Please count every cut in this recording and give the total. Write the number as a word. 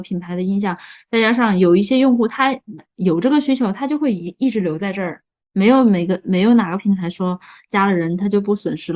one